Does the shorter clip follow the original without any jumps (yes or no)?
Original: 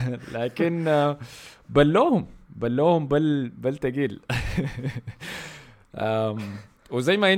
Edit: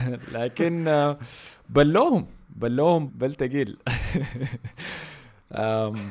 no